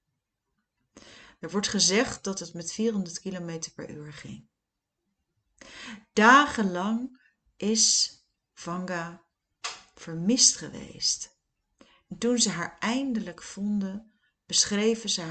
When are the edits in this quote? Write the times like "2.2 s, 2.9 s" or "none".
none